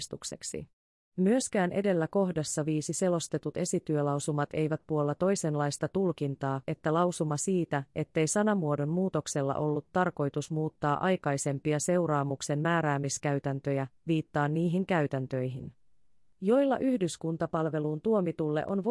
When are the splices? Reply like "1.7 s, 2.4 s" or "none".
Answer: 6.6 s